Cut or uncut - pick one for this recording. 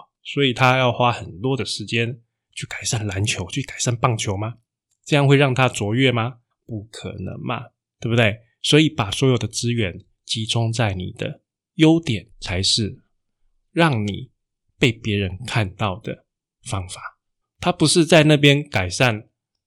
cut